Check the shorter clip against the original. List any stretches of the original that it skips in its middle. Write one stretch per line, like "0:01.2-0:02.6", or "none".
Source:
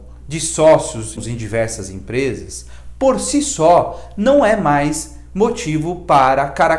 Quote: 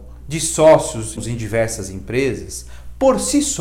none

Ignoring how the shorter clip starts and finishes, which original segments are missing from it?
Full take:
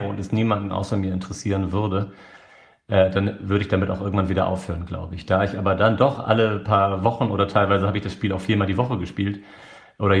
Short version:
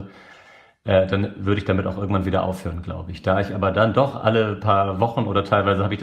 none

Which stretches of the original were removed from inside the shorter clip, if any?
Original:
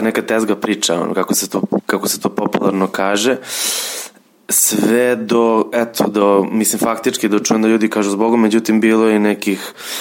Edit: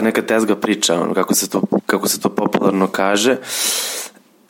none

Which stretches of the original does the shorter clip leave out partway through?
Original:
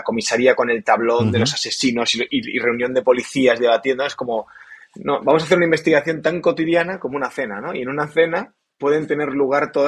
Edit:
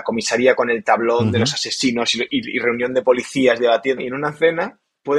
0:04.0-0:07.7

